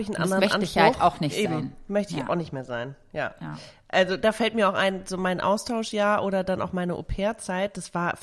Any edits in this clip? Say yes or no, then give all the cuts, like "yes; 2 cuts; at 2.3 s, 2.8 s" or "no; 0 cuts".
no; 0 cuts